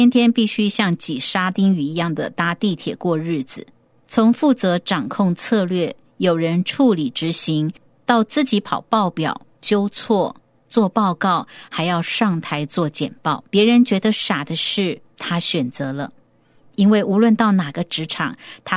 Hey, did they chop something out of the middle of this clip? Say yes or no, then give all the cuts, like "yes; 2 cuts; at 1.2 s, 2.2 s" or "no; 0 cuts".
yes; 1 cut; at 13.5 s